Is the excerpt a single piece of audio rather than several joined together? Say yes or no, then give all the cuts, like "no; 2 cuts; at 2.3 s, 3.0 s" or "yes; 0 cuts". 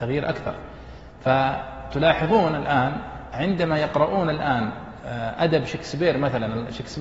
yes; 0 cuts